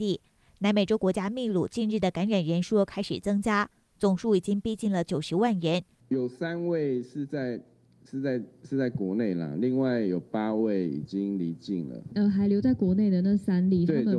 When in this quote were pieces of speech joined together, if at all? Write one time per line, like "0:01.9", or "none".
0:06.0